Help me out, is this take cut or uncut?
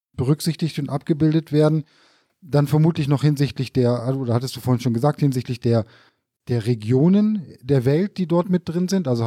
uncut